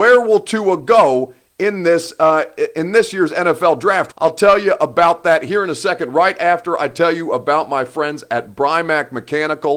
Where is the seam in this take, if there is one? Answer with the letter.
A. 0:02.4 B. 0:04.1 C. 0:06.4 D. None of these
B